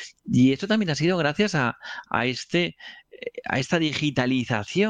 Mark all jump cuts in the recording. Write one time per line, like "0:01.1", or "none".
none